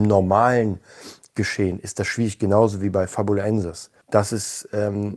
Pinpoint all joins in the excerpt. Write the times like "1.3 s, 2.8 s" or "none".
4.0 s